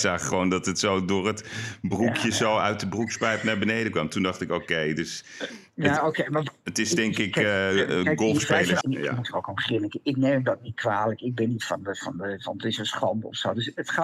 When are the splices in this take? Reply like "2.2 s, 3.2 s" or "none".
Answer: 8.8 s